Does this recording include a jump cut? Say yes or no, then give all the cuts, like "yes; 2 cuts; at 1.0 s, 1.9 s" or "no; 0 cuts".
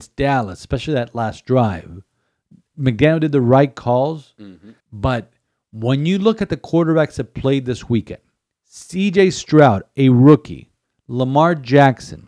yes; 1 cut; at 4.8 s